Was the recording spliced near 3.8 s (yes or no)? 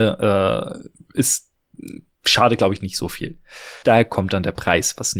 yes